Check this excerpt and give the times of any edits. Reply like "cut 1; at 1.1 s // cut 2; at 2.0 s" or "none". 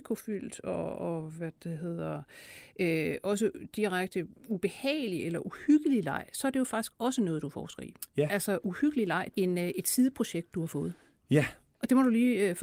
cut 1; at 9.3 s